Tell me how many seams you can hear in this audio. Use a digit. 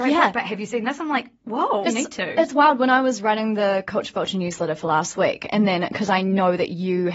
1